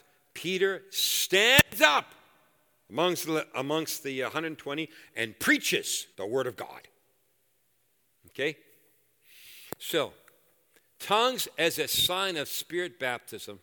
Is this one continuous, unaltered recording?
no; 1 cut; at 6.1 s

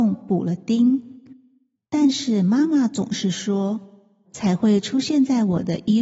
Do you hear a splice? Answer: yes; 2 cuts; at 1.8 s, 4.2 s

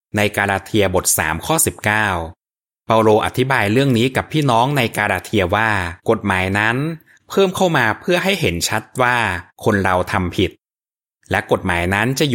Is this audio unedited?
no; 2 cuts; at 6.0 s, 9.5 s

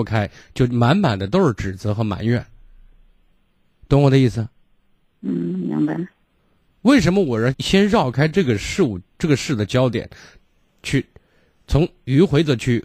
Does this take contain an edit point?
yes; 1 cut; at 7.5 s

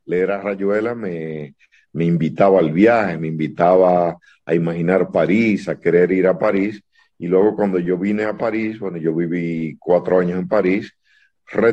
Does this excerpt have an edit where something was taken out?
no; 0 cuts

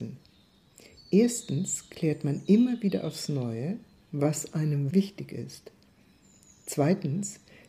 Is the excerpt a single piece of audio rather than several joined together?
no; 1 cut; at 4.9 s

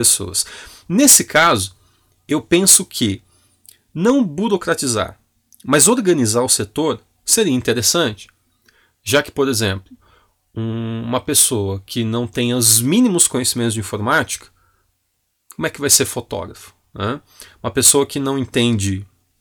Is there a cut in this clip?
no; 0 cuts

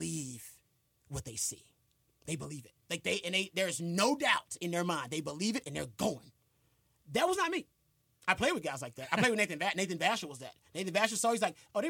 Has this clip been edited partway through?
no; 0 cuts

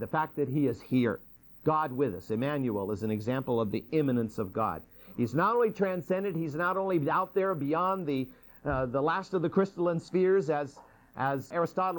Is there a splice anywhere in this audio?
no; 0 cuts

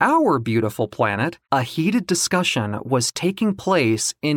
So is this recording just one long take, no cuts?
no; 1 cut; at 1.4 s

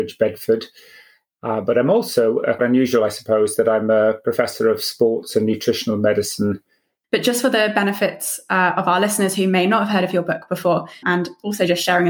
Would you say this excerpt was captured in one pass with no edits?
no; 3 cuts; at 2.6 s, 7.0 s, 11.0 s

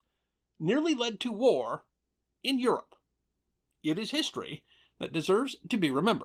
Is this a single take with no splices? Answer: yes; 0 cuts

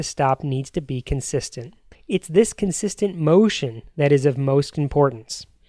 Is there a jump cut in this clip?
yes; 1 cut; at 1.9 s

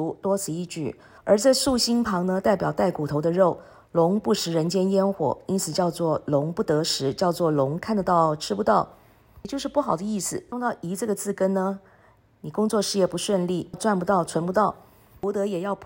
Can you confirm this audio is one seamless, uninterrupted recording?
no; 3 cuts; at 1.2 s, 10.5 s, 13.7 s

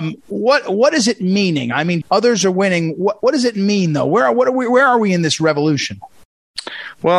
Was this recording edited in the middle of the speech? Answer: yes; 1 cut; at 2.0 s

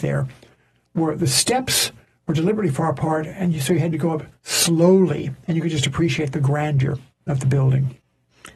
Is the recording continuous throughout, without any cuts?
yes; 0 cuts

